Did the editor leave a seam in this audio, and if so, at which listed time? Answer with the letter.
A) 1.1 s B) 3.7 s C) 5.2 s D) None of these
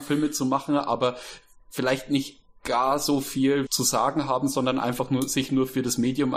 B